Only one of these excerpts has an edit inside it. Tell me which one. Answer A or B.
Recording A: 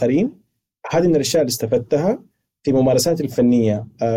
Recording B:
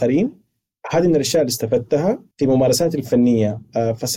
B